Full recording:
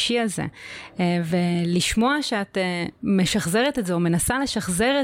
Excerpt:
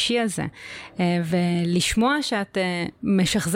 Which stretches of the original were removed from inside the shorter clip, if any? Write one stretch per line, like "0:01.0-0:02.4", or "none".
none